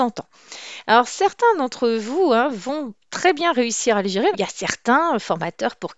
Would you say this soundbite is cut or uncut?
cut